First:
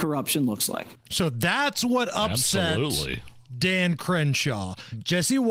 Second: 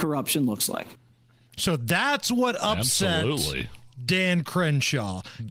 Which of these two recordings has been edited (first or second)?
first